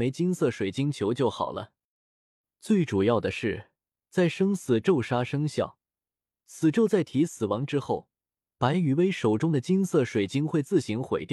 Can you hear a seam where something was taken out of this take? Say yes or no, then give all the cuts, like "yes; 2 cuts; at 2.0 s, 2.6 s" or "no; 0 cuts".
no; 0 cuts